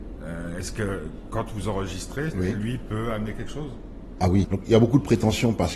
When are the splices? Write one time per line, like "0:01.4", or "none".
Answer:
0:02.3
0:04.4